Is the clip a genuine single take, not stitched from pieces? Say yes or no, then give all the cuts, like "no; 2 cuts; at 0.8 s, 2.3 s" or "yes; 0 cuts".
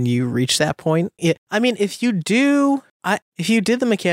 no; 1 cut; at 1.2 s